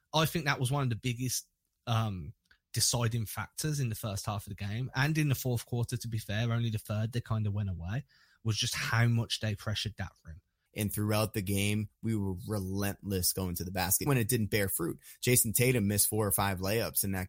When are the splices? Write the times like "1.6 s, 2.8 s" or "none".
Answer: 10.7 s, 14.1 s